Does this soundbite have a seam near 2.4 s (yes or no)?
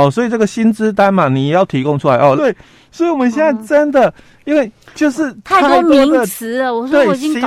yes